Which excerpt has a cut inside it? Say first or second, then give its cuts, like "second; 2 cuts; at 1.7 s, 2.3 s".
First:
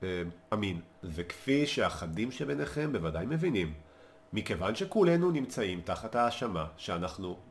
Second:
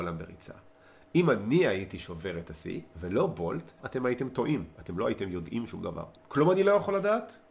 second; 2 cuts; at 3.8 s, 6.2 s